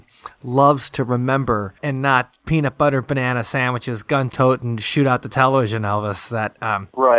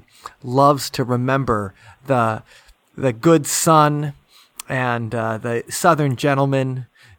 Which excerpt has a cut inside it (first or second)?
first